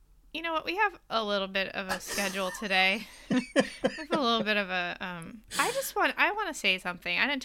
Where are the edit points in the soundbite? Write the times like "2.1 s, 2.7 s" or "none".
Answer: none